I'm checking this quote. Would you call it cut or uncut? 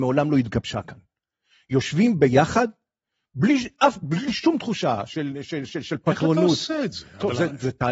uncut